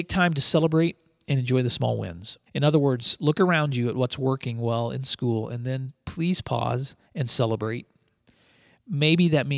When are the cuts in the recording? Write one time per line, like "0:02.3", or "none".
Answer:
0:02.5
0:07.0